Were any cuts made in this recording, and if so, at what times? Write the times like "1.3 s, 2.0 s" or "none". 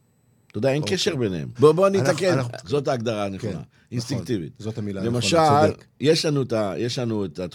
1.5 s, 2.6 s

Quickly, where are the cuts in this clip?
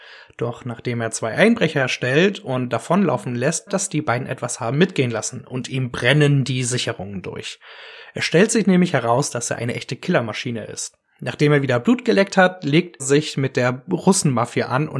3.7 s, 13.0 s

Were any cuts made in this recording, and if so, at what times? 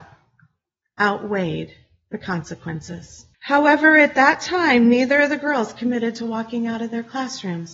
3.3 s

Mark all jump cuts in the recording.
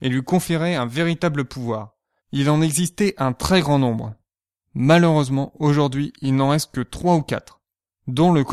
2.2 s

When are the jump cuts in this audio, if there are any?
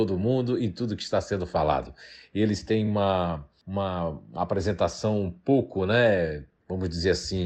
none

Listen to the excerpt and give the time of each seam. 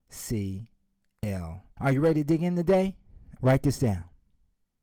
1.8 s, 3.4 s

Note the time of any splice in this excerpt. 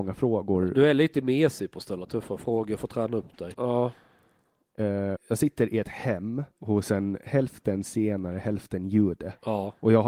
3.5 s, 5.2 s, 6.5 s

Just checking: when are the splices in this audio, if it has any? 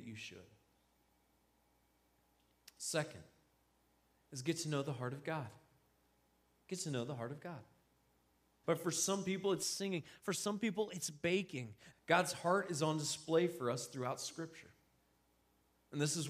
8.6 s, 11.9 s

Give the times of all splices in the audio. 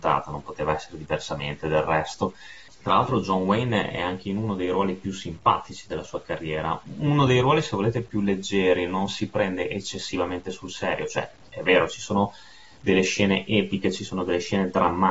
2.7 s

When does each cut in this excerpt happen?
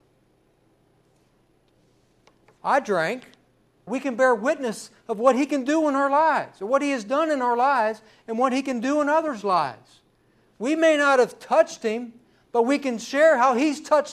3.9 s

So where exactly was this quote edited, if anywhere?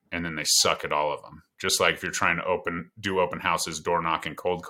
none

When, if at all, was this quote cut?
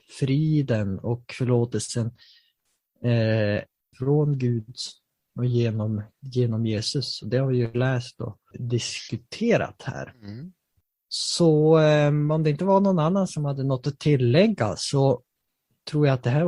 3.9 s, 8.5 s

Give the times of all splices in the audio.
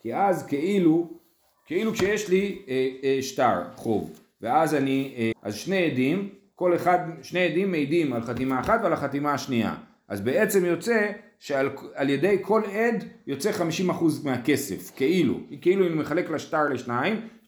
5.3 s

